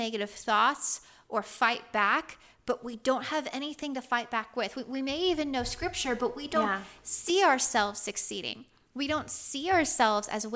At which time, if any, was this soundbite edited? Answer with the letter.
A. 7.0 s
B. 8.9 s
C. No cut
C